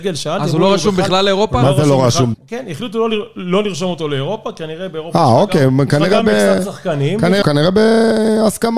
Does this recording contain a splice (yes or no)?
yes